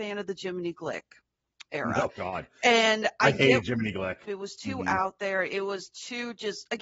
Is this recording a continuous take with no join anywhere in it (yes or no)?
no